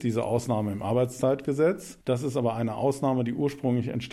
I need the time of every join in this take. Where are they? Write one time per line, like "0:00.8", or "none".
0:02.0